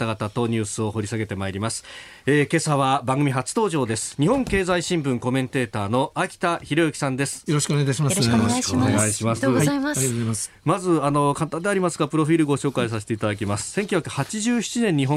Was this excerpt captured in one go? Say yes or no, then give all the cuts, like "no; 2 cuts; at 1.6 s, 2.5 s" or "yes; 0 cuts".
no; 2 cuts; at 7.5 s, 9.4 s